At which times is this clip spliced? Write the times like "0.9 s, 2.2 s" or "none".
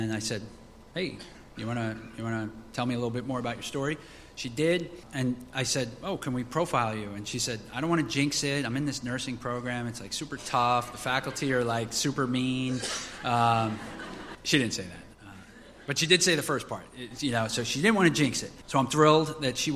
14.3 s, 18.6 s